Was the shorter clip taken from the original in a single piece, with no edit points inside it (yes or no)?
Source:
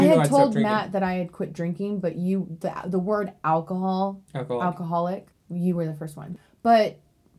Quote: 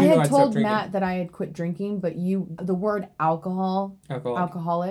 no